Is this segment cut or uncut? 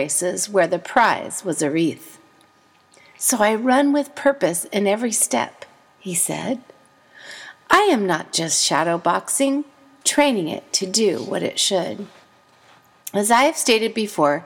cut